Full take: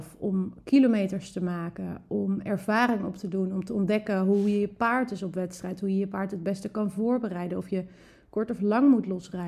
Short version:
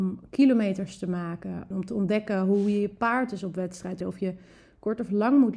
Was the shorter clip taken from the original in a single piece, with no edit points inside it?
no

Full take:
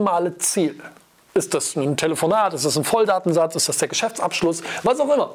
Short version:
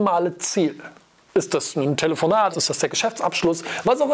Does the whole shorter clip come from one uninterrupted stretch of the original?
no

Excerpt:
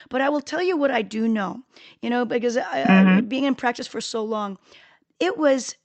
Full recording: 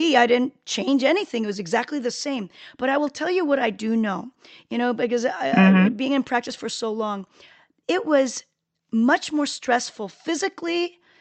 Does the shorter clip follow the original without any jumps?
yes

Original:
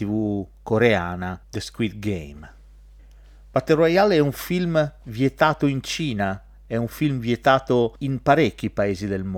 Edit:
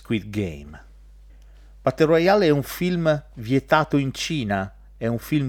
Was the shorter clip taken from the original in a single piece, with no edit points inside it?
yes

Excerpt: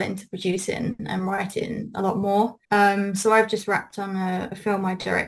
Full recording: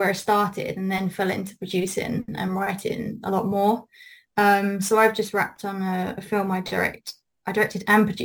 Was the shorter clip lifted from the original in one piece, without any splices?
no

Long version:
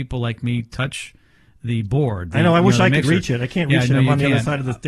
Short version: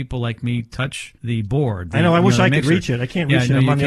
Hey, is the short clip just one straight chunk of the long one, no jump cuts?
no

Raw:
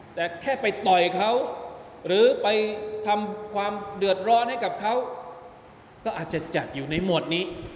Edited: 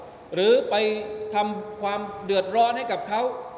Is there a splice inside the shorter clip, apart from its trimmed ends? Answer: no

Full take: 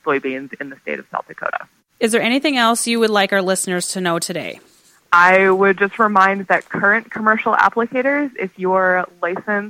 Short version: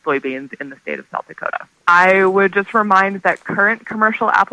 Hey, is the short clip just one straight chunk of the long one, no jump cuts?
no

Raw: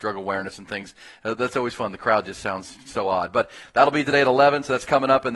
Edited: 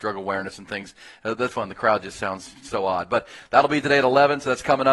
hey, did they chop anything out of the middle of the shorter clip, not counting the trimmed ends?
yes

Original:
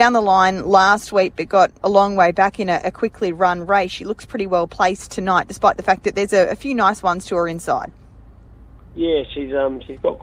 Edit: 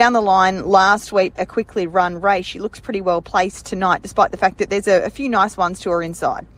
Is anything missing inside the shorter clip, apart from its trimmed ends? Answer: yes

